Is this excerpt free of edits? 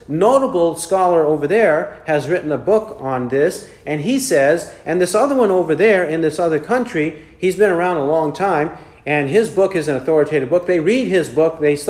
yes; 0 cuts

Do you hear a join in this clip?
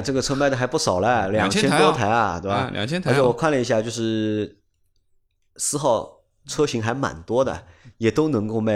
no; 0 cuts

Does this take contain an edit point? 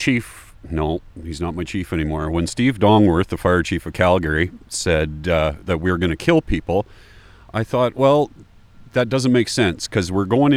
no; 0 cuts

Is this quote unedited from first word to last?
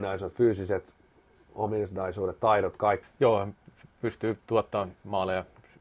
no; 1 cut; at 3.0 s

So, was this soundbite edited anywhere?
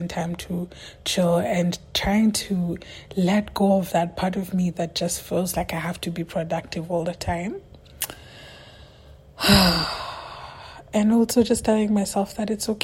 no; 0 cuts

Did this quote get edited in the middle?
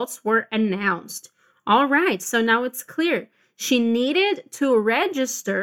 no; 0 cuts

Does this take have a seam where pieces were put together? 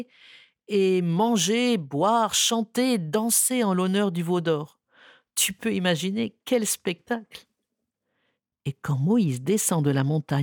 no; 0 cuts

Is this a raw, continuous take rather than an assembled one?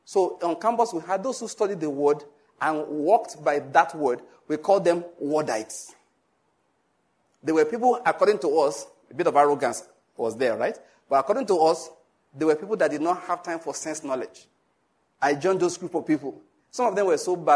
no; 1 cut; at 15.1 s

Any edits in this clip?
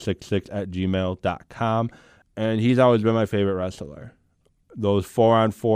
yes; 1 cut; at 2.2 s

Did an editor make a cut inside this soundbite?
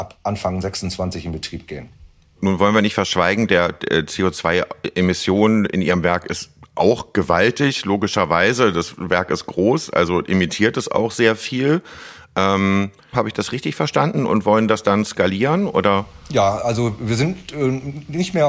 yes; 1 cut; at 13.1 s

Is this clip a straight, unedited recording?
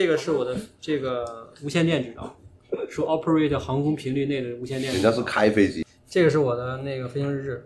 yes; 0 cuts

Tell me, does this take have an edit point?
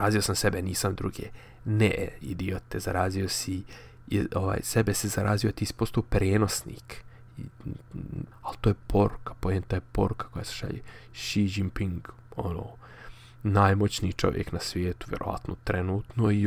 yes; 1 cut; at 8.3 s

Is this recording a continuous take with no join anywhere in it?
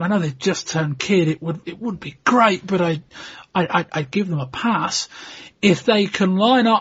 yes; 0 cuts

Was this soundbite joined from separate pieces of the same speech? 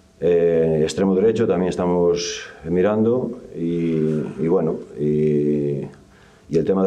no; 0 cuts

